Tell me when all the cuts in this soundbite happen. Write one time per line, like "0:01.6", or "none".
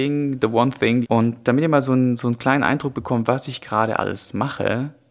0:01.0